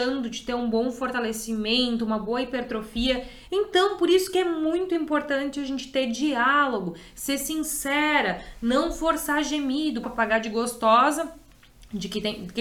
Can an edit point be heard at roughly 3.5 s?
yes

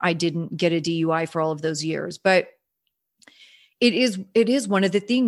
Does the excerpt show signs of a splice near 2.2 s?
no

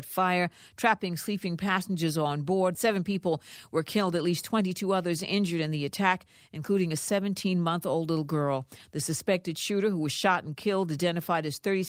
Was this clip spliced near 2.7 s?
yes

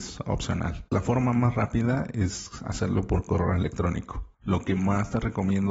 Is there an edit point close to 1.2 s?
no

